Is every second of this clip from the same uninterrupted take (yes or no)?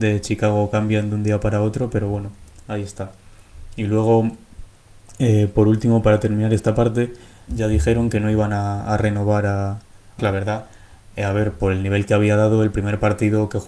no